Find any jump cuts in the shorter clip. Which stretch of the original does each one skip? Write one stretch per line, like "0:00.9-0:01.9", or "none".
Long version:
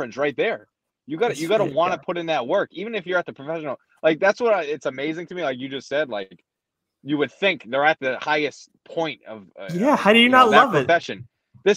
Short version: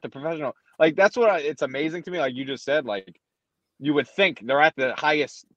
none